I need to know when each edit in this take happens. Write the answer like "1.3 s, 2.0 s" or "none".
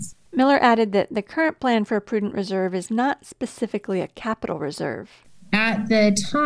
none